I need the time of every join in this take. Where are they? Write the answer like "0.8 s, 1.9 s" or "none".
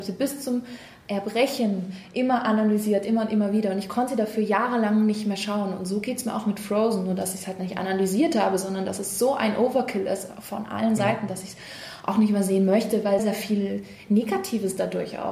13.2 s